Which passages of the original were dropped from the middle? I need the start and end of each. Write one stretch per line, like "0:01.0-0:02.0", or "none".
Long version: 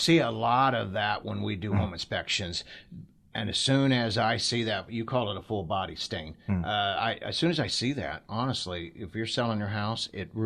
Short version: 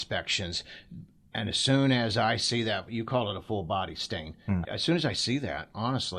0:06.7-0:07.2

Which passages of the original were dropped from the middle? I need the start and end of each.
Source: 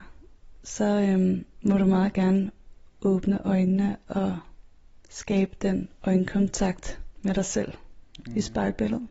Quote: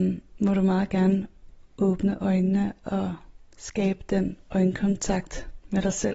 0:04.7-0:05.0

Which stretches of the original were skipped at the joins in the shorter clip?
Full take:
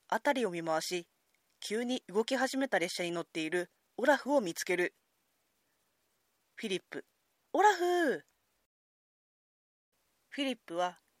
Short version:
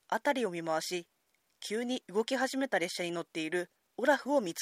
none

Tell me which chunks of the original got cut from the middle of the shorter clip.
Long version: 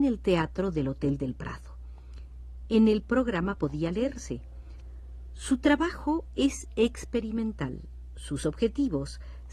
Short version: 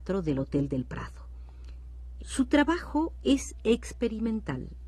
0:02.7-0:05.3

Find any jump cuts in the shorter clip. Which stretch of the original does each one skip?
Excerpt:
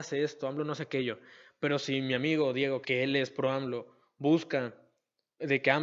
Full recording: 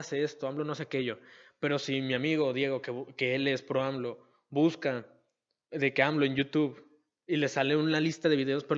0:02.8-0:03.1

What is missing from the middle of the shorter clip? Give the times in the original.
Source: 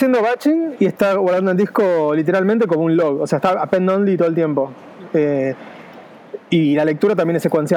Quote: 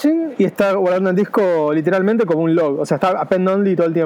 none

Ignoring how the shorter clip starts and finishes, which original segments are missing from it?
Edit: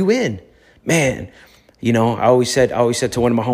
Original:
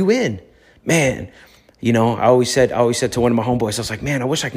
none

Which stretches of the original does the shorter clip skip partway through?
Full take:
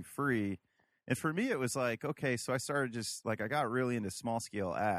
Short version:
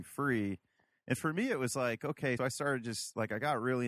0:02.4-0:02.5

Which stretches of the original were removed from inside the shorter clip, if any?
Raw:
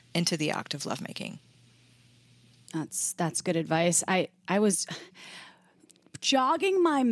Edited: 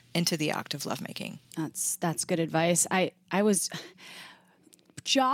0:01.4-0:02.6

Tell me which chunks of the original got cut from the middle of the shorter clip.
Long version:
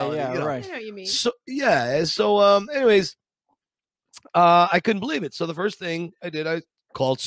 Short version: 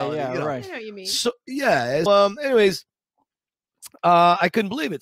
0:02.1-0:02.4

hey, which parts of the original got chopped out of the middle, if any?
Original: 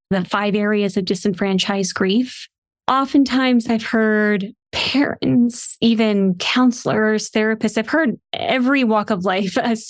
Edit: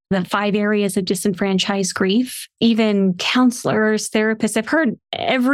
0:02.6-0:05.8

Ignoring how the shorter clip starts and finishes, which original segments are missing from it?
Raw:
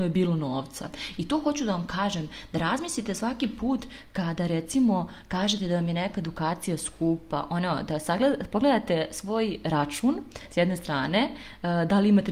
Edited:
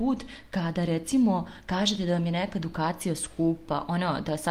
none

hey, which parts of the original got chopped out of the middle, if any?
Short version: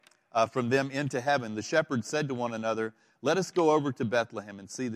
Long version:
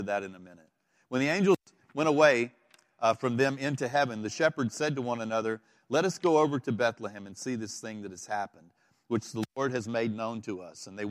none

